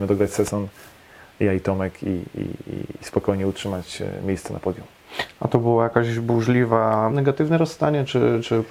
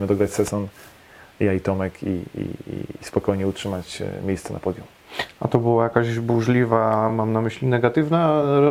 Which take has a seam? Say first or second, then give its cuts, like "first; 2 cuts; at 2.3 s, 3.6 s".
first; 1 cut; at 7.1 s